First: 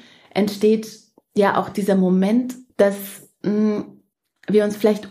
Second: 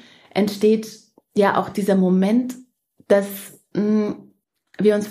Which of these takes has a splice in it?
first; 1 cut; at 2.7 s

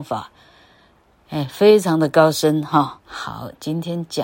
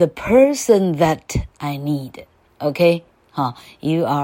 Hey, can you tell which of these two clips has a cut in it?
first; 1 cut; at 3.0 s

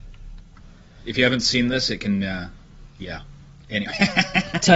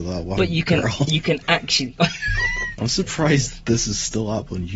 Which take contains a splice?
second; 1 cut; at 2.8 s

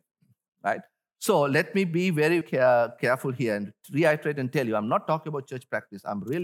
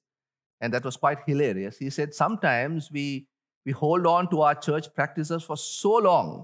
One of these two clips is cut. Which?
first; 1 cut; at 2.4 s

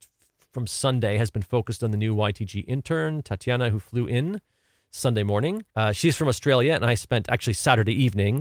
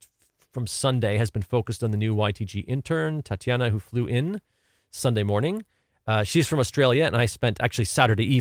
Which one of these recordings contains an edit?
first; 1 cut; at 5.7 s

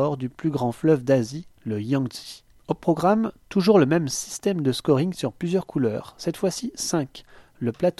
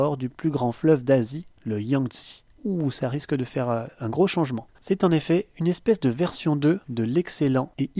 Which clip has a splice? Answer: second; 2 cuts; at 2.6 s, 4.7 s

